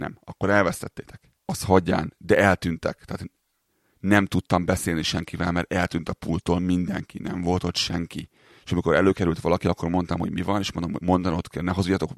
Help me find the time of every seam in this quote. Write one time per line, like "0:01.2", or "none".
0:01.5

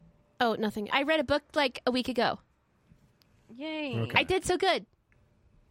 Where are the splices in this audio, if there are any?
0:00.9

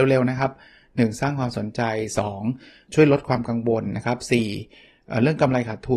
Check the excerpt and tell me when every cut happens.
0:02.9

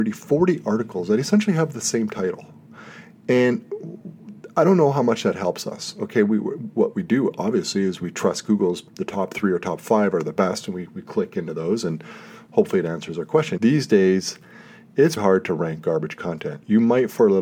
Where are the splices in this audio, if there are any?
0:08.9
0:13.6
0:15.2

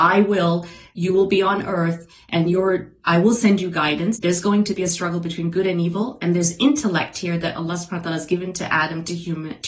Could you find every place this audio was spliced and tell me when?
0:04.1

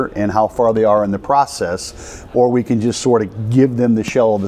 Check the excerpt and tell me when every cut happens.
0:02.3

